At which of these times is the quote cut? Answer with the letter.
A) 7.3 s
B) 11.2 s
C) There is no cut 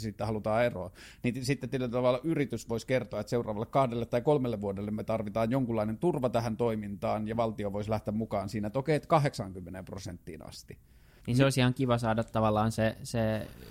B